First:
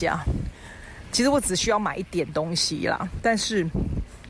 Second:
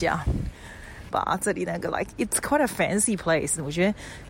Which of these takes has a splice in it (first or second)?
second